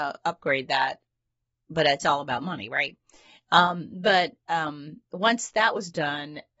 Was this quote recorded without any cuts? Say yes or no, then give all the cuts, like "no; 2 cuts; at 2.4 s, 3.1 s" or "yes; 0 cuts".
yes; 0 cuts